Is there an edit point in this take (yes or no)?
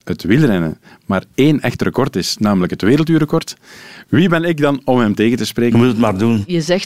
yes